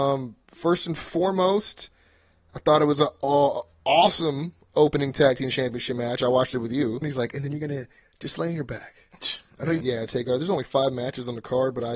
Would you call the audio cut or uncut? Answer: cut